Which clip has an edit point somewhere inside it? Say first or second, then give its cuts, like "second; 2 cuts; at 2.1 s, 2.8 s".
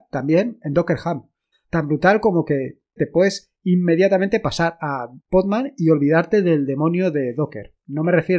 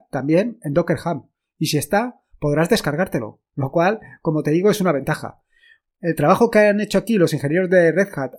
first; 3 cuts; at 1.5 s, 3.0 s, 5.2 s